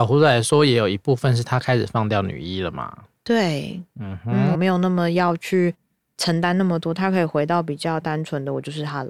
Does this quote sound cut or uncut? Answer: cut